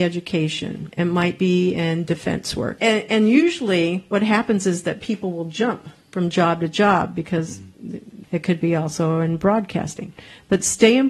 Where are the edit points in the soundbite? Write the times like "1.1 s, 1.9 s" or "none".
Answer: 2.8 s, 8.2 s